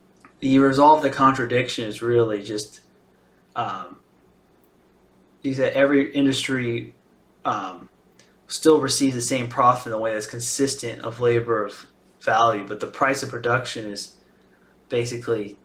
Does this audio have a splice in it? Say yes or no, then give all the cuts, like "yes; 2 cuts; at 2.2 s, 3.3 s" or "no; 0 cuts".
no; 0 cuts